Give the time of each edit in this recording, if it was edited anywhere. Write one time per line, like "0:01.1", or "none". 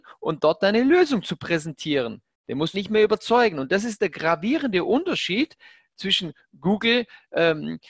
0:02.7